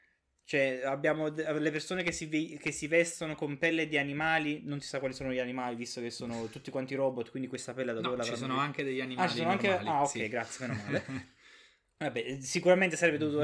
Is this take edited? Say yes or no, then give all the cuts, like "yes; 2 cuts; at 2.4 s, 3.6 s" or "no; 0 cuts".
no; 0 cuts